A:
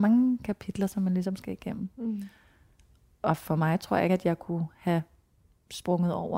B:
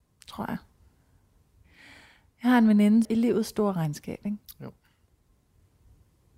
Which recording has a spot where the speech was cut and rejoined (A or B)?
B